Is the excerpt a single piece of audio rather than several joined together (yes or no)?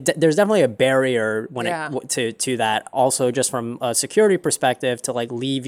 yes